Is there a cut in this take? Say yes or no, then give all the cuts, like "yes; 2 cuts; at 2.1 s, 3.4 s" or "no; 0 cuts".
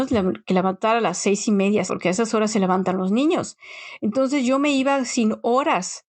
yes; 1 cut; at 1.9 s